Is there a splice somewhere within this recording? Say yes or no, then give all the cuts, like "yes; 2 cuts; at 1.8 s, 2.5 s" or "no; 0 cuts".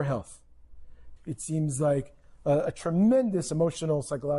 yes; 1 cut; at 1.2 s